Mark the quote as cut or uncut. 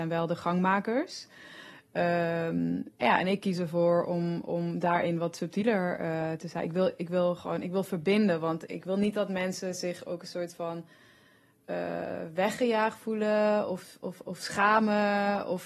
cut